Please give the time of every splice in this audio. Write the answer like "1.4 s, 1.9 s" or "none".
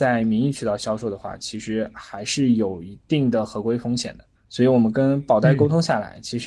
4.3 s

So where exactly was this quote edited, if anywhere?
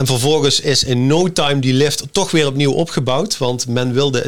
none

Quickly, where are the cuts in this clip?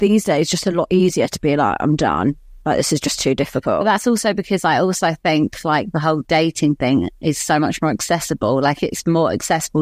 none

